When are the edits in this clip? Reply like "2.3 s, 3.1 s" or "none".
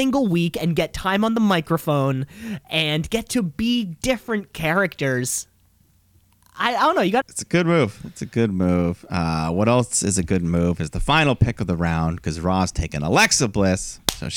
7.2 s